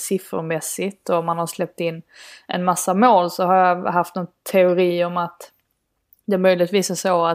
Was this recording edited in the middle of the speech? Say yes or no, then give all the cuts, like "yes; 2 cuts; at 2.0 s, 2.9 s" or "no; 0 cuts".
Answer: no; 0 cuts